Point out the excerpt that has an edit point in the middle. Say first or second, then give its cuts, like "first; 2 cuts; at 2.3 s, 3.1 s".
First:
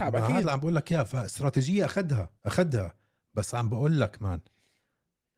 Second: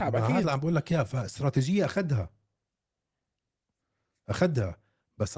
first; 1 cut; at 2.4 s